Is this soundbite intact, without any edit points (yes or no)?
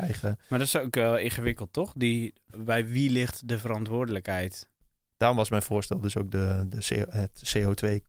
no